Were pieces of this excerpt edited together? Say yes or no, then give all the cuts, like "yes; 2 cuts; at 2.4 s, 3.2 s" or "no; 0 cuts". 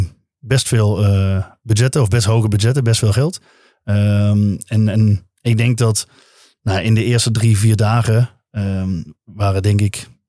no; 0 cuts